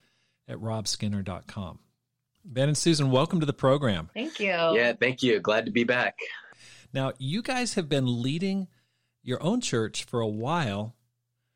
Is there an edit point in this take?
no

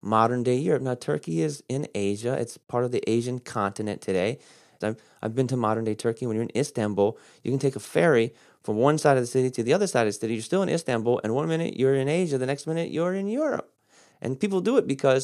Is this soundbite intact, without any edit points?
no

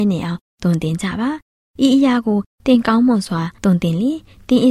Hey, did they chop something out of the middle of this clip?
yes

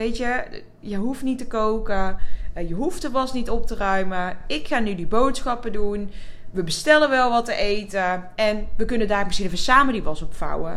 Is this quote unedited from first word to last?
yes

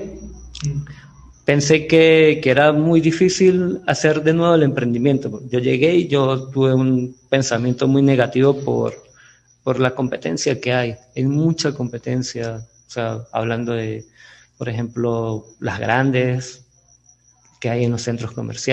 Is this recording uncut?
yes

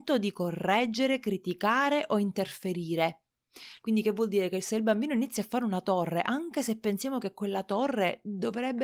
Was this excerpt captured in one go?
no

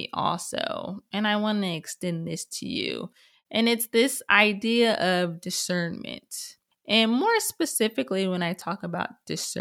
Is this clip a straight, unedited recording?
yes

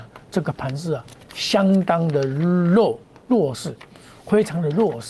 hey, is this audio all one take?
yes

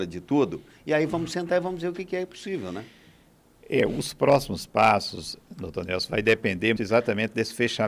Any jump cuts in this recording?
yes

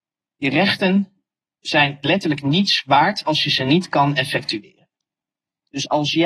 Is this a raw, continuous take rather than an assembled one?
yes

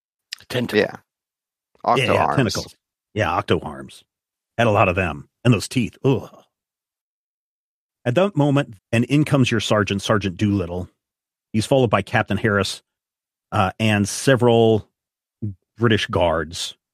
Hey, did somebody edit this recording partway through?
yes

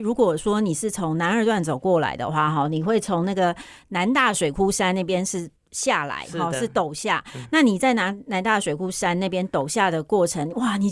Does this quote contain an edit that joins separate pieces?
no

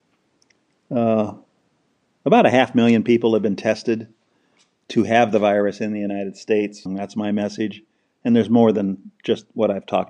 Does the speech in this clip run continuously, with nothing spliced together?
no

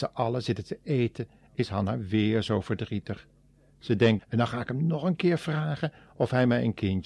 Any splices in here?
yes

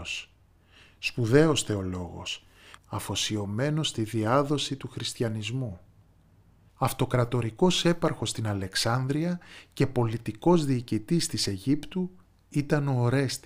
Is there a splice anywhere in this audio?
yes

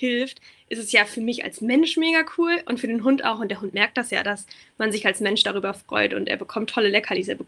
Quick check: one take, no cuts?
yes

